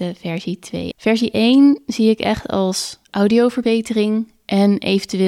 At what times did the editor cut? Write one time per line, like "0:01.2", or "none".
0:00.9
0:03.0